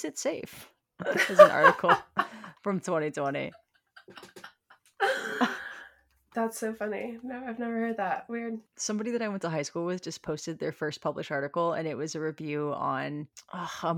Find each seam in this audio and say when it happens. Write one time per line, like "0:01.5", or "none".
none